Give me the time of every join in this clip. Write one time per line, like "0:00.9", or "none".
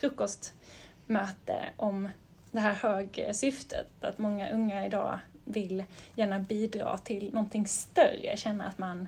none